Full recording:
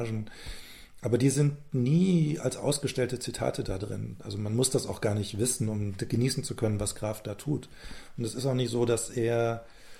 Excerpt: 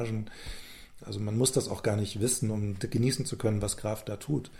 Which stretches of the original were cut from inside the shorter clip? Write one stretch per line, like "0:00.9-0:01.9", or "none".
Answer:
0:01.0-0:04.2